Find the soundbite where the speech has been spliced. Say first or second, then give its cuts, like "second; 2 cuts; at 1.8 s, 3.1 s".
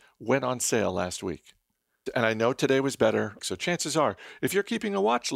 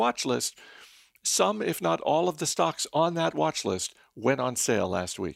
first; 2 cuts; at 2.1 s, 3.4 s